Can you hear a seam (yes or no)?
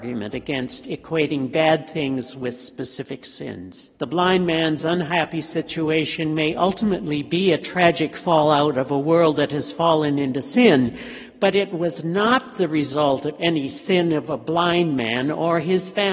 yes